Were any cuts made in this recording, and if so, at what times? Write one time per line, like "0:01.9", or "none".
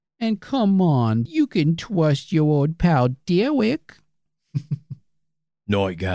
0:01.3